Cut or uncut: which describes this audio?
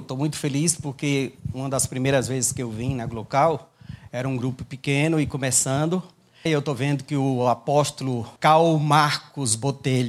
cut